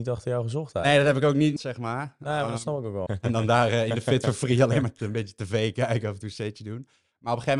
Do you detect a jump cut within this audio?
yes; 2 cuts; at 1.6 s, 3.1 s

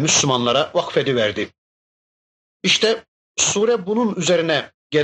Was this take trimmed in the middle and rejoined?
no; 0 cuts

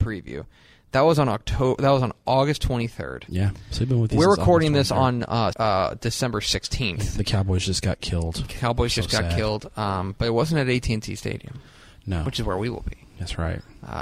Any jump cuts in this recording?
yes; 1 cut; at 5.5 s

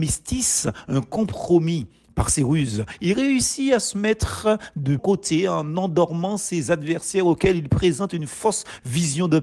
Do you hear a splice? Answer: yes; 1 cut; at 5.0 s

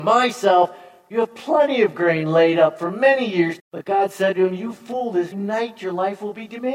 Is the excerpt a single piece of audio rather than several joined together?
no; 2 cuts; at 3.6 s, 5.3 s

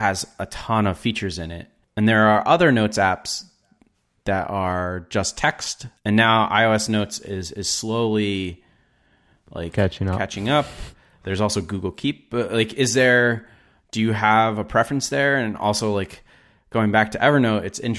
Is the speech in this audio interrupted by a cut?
no; 0 cuts

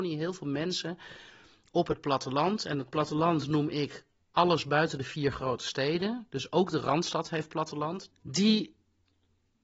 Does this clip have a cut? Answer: yes; 1 cut; at 8.1 s

